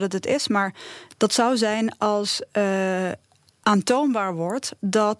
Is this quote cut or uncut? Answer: uncut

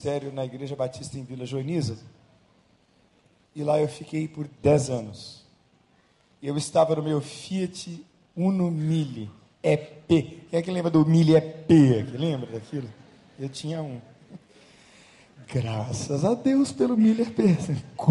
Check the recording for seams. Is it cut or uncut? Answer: uncut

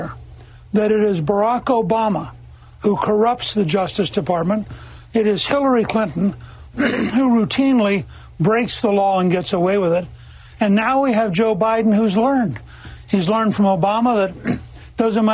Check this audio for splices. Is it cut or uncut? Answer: uncut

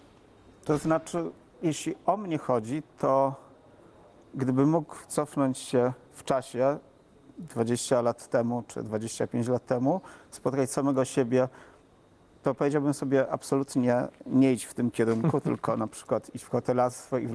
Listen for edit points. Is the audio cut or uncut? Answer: uncut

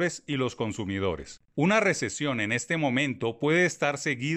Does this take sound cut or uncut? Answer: cut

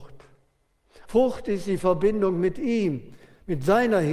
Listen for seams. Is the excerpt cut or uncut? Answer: cut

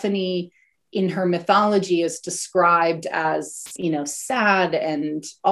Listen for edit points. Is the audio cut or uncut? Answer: uncut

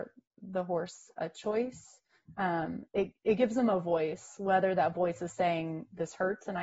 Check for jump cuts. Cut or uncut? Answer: uncut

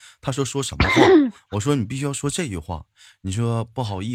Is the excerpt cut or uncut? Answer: uncut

